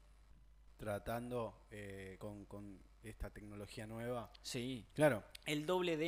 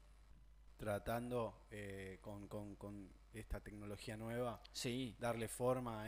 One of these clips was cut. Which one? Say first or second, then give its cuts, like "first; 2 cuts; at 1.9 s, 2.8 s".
first; 2 cuts; at 2.2 s, 4.9 s